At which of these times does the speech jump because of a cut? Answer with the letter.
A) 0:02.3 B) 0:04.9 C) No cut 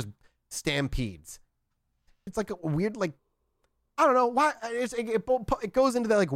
A